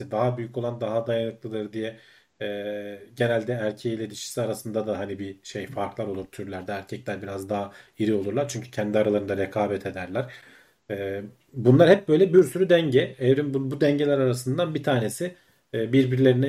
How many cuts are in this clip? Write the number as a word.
zero